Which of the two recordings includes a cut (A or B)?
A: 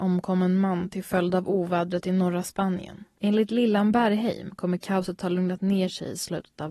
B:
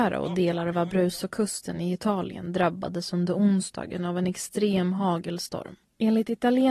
A